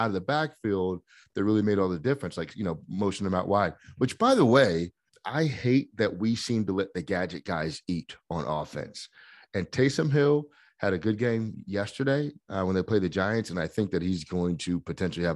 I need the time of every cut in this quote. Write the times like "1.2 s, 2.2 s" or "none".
5.1 s